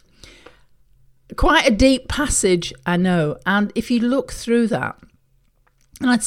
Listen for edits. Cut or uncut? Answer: uncut